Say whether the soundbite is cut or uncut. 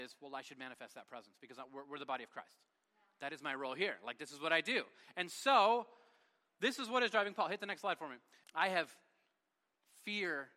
cut